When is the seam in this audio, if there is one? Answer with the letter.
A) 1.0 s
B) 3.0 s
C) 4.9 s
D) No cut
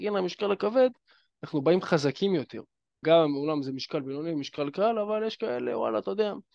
B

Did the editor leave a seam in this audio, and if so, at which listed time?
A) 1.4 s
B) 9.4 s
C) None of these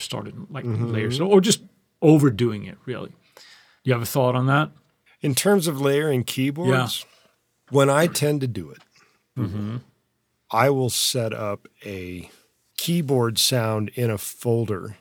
B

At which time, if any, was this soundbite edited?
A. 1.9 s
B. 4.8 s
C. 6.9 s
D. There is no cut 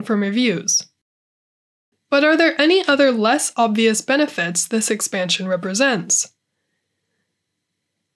A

